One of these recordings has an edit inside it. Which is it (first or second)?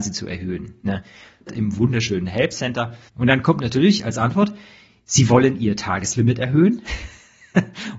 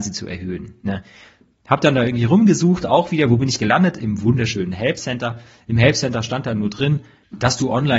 first